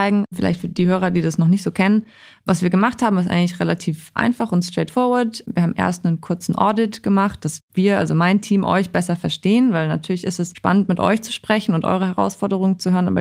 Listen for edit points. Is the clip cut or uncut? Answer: uncut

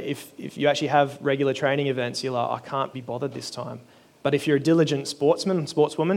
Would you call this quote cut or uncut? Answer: cut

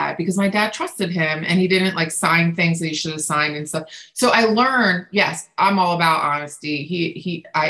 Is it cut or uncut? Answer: uncut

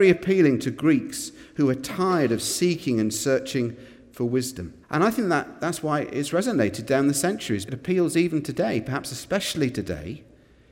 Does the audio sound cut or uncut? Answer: cut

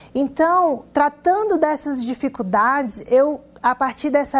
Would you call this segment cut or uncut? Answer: uncut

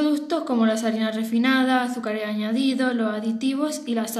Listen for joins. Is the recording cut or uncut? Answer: uncut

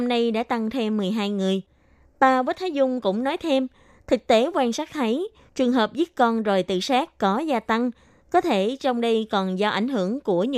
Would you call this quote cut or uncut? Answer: uncut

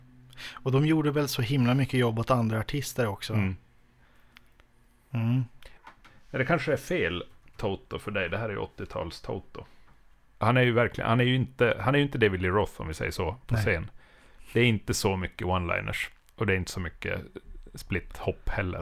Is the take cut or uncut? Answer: cut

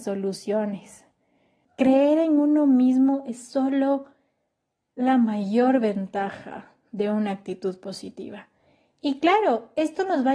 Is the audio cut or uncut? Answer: cut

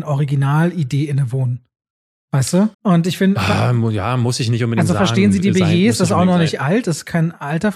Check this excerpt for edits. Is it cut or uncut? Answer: cut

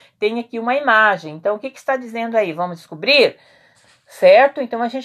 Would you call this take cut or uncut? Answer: uncut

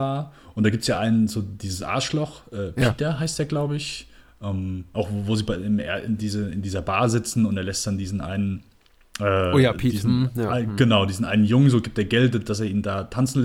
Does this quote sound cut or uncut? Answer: uncut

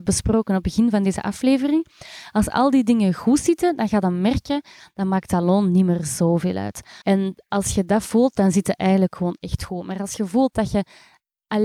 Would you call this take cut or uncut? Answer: cut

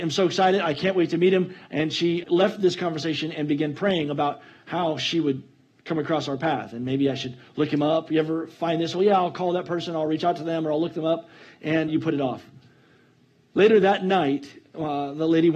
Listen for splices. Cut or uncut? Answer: cut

